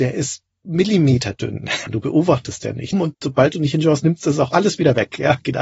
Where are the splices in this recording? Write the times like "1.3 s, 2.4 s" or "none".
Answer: 1.9 s, 2.9 s